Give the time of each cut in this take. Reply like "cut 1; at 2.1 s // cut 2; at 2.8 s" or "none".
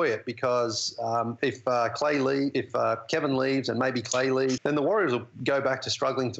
cut 1; at 1.4 s // cut 2; at 4.6 s